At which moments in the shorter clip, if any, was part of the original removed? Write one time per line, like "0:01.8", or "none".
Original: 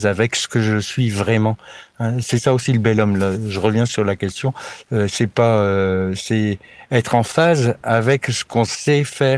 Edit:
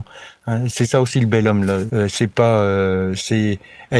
0:01.9